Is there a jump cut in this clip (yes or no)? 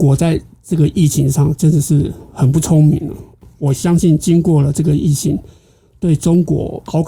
no